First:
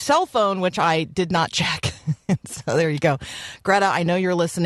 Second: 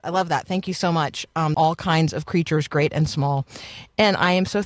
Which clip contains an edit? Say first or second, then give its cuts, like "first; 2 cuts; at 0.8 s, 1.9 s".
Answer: second; 1 cut; at 1.5 s